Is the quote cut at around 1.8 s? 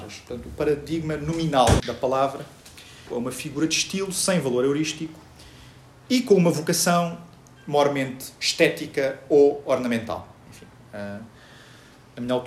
yes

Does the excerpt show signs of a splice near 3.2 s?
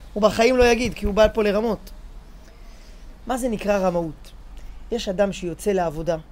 yes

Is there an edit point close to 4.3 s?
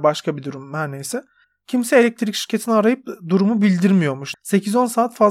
yes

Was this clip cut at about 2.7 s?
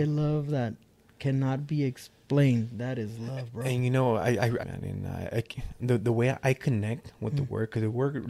no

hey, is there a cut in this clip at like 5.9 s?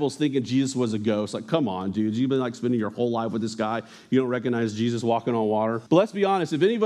yes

